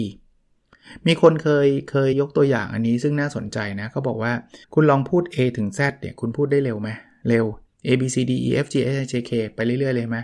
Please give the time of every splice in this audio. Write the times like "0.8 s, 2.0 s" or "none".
2.1 s, 4.6 s